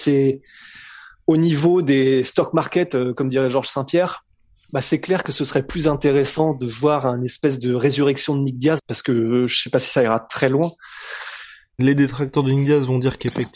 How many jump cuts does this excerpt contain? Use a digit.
2